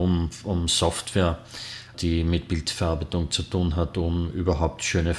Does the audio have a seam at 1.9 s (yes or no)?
yes